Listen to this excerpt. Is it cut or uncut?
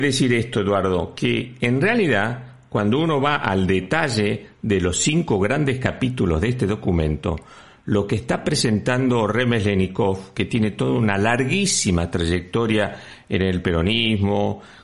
uncut